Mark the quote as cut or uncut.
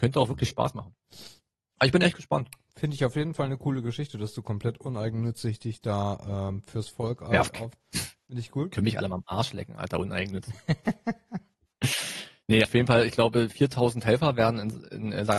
cut